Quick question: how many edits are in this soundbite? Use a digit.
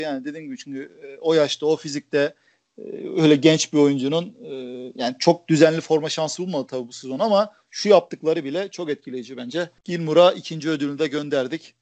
1